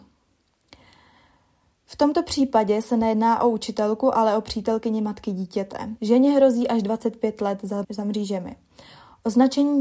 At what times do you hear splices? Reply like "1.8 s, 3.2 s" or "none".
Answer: 6.0 s, 7.8 s